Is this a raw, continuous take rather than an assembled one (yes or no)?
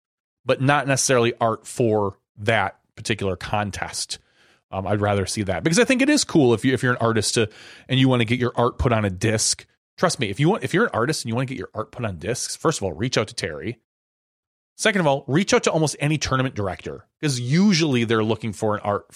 yes